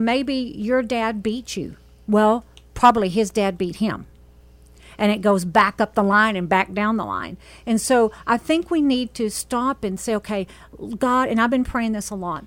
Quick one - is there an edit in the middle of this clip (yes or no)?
no